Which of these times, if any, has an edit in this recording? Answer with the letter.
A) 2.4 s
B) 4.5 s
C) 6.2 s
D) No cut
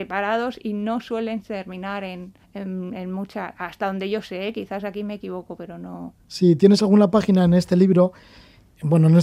A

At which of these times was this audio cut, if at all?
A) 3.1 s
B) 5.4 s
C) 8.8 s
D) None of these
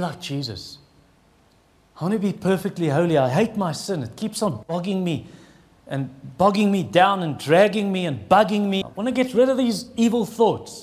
C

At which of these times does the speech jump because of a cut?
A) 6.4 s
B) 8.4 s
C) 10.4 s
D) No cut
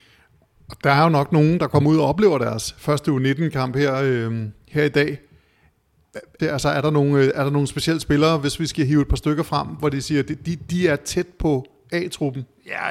A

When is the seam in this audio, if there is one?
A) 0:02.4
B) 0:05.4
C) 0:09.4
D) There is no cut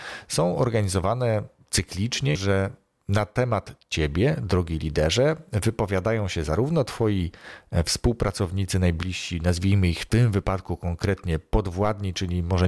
A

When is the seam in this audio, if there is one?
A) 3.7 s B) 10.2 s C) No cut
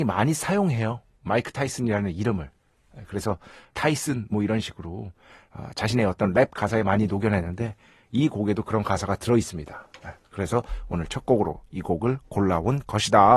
A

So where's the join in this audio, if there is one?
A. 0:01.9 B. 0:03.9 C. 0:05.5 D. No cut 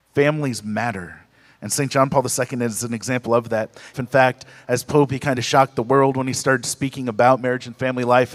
B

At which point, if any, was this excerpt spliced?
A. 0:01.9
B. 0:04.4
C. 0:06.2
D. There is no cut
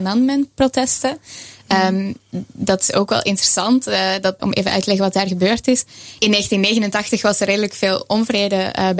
B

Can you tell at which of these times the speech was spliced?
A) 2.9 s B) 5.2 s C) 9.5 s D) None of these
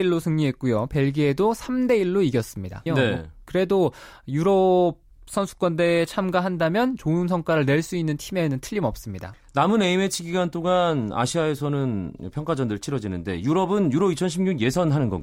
A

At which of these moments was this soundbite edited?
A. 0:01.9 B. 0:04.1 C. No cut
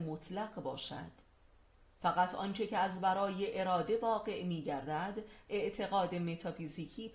C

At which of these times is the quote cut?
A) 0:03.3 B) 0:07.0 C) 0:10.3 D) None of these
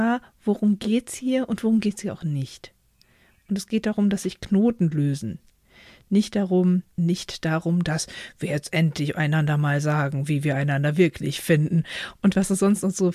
B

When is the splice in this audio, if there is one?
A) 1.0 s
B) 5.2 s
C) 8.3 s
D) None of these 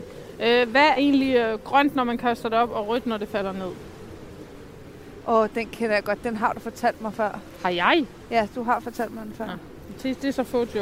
A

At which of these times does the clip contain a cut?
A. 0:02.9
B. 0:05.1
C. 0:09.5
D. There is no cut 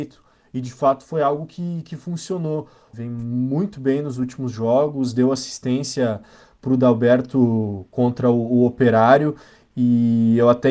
A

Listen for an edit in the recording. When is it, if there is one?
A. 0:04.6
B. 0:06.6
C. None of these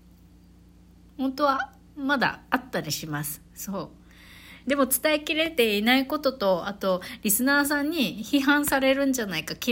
A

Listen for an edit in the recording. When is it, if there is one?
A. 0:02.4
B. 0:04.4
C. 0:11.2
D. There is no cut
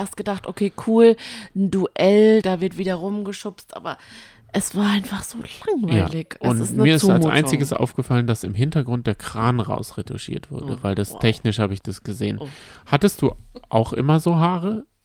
A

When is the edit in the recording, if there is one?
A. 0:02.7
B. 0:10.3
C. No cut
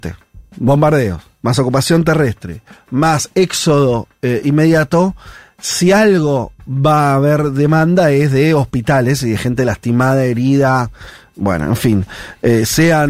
C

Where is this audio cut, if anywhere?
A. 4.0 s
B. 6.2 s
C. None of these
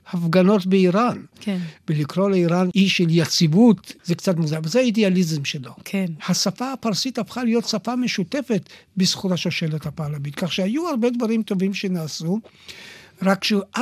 B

